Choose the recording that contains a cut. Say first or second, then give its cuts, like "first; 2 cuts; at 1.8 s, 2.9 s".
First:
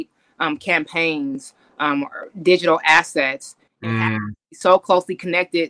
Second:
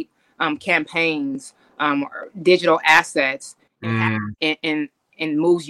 second; 1 cut; at 4.4 s